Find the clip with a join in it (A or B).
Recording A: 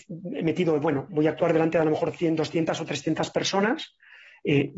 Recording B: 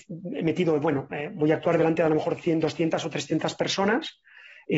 A